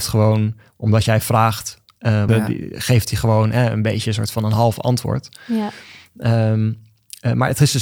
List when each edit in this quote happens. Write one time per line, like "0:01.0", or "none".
0:02.3